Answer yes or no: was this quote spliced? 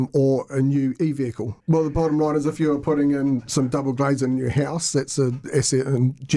yes